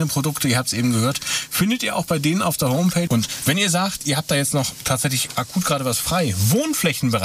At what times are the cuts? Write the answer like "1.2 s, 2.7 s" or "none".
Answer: 3.1 s